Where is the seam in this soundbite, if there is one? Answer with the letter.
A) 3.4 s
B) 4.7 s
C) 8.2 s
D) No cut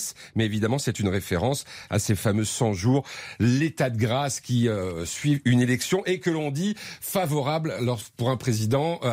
D